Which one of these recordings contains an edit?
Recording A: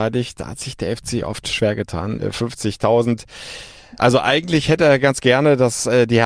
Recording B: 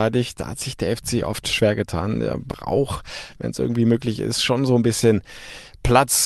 A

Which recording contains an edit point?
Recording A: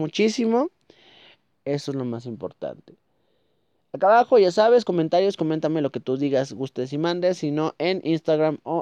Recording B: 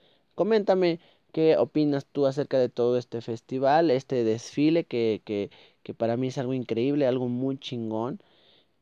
A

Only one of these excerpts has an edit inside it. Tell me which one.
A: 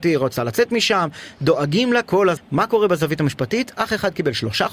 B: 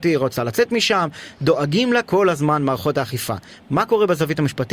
A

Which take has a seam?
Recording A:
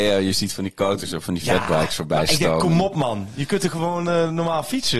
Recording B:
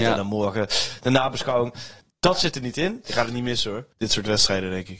B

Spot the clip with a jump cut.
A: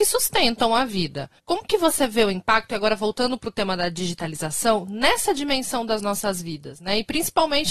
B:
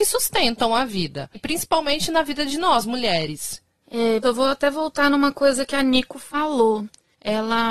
B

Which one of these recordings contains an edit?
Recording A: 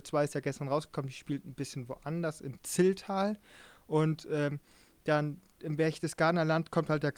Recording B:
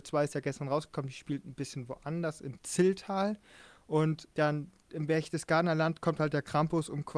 B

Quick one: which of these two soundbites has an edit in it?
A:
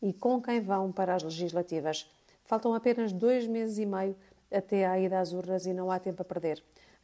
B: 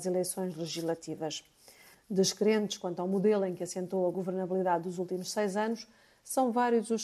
B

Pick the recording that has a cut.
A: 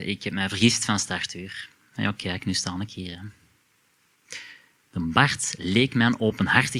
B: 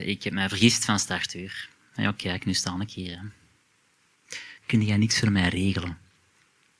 B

